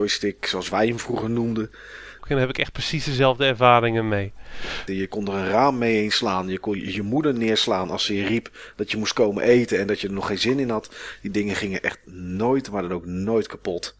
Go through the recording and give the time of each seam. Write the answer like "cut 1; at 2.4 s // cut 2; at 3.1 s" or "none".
cut 1; at 2.2 s // cut 2; at 4.9 s